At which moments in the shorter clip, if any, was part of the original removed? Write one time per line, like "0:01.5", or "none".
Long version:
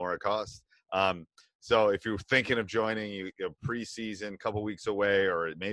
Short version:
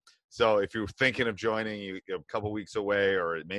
0:02.3